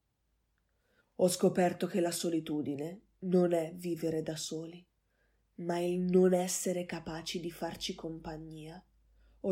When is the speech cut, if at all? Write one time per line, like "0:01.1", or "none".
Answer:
0:01.0